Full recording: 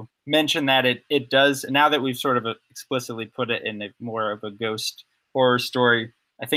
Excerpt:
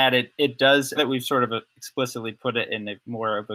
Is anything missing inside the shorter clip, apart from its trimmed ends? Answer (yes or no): yes